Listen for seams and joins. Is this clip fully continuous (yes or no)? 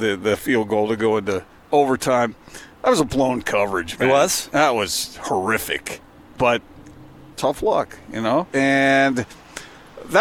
no